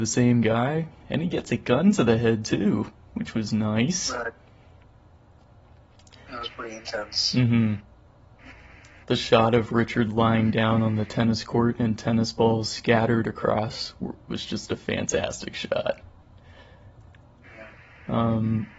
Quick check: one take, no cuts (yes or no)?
yes